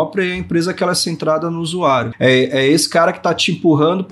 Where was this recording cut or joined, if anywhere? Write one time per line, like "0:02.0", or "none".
0:02.1